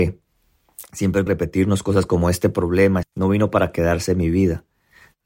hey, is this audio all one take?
no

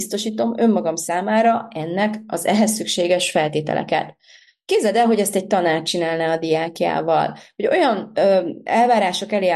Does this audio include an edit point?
no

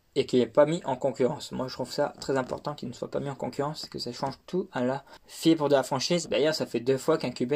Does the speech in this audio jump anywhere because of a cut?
yes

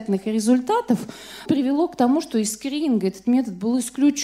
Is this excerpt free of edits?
no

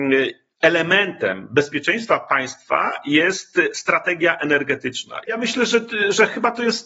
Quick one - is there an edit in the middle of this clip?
yes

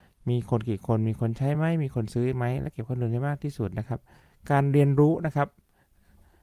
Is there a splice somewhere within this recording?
no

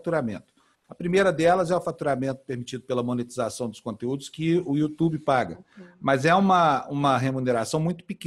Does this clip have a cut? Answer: no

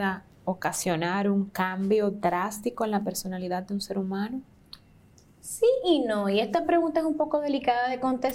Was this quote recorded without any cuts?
yes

